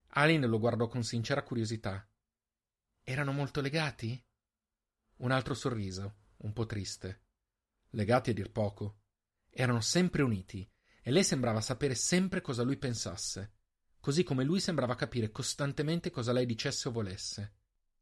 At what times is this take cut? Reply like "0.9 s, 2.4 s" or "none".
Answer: none